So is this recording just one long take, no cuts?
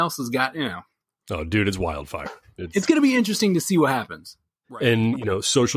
no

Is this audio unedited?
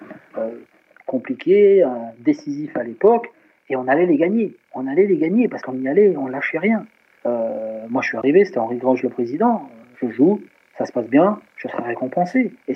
no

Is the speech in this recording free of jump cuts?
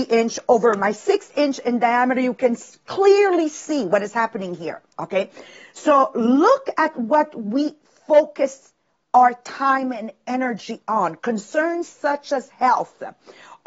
yes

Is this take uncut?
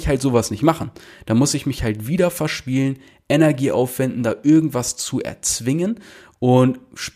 yes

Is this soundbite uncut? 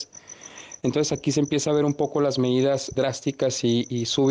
no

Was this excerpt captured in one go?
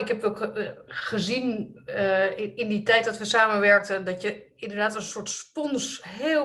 yes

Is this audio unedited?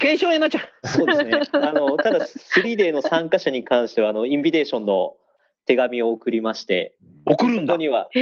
yes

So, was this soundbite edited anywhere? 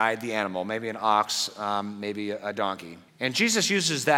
yes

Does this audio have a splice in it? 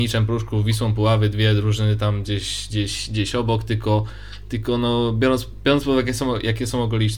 no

